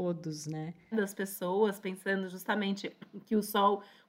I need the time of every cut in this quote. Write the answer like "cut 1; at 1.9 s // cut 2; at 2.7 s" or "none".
cut 1; at 0.9 s